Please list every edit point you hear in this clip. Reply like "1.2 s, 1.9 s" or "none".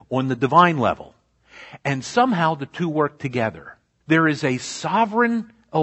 4.0 s